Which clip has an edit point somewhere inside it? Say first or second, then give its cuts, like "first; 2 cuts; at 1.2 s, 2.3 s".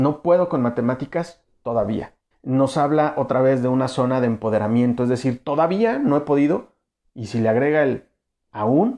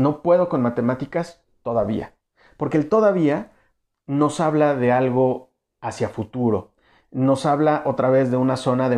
first; 2 cuts; at 2.3 s, 7.1 s